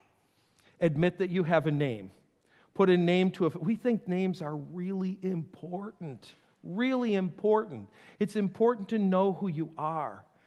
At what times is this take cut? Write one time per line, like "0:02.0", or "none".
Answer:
none